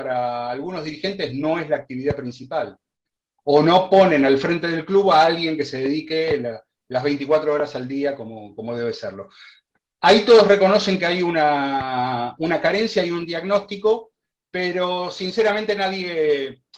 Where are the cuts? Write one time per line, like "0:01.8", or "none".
0:03.4